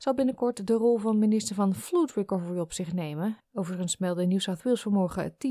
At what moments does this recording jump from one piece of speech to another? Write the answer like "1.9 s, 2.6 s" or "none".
3.4 s

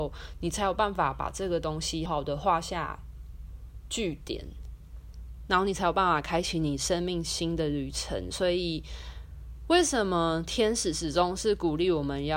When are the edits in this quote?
2.1 s

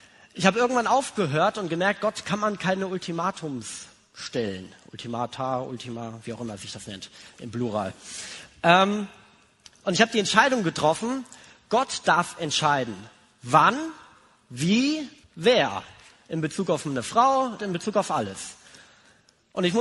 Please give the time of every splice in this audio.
15.2 s, 17.6 s

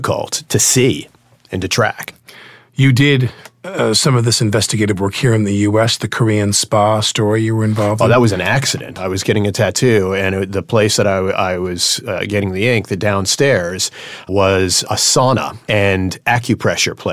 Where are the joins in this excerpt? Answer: none

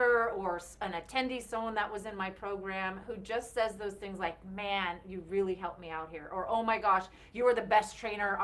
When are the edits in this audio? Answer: none

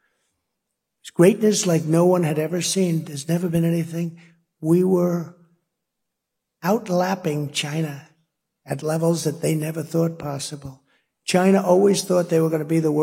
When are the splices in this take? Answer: none

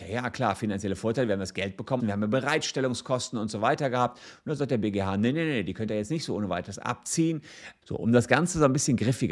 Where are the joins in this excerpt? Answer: 2.0 s, 7.8 s

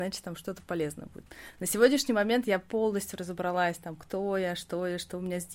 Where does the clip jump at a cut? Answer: none

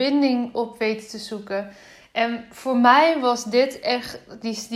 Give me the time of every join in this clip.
none

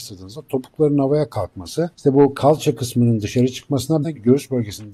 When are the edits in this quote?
1.9 s, 4.0 s

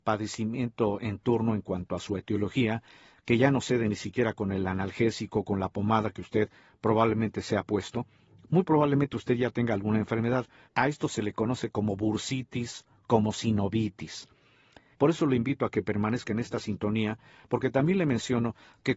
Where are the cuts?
10.7 s, 14.9 s

